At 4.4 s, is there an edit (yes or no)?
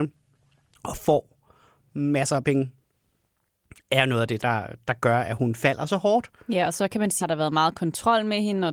yes